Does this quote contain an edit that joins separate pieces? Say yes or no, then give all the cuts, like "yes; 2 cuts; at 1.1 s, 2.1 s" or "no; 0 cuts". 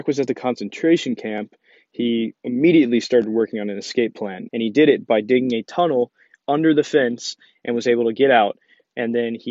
yes; 2 cuts; at 2.4 s, 4.5 s